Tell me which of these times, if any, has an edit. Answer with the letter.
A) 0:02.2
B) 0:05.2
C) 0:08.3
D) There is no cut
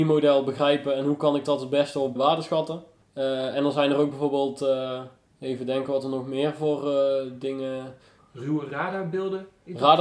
A